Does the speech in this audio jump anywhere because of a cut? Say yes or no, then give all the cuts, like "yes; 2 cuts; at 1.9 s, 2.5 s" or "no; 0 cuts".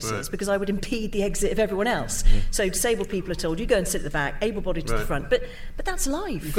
no; 0 cuts